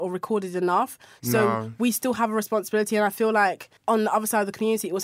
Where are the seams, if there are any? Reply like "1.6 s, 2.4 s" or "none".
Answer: 3.8 s